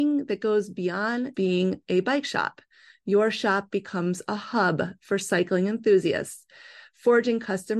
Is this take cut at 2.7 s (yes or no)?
no